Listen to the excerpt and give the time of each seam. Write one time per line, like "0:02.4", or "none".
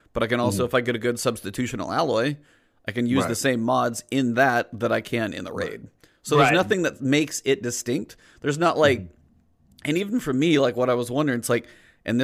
none